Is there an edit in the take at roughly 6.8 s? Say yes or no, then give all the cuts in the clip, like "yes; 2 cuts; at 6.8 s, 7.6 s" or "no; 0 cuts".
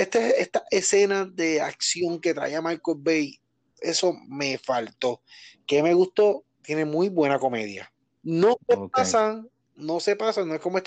no; 1 cut; at 8.2 s